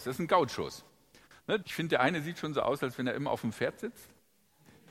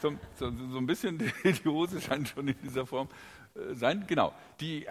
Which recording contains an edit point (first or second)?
first